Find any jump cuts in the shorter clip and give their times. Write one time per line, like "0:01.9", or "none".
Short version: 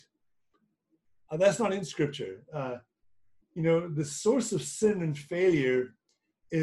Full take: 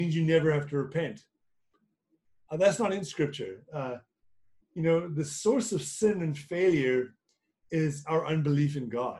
none